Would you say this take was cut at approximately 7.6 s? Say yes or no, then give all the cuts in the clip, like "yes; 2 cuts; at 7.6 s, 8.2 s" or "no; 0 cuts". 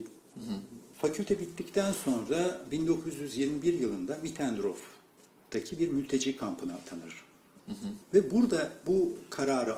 yes; 2 cuts; at 0.9 s, 7.6 s